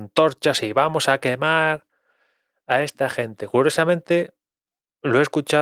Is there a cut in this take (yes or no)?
no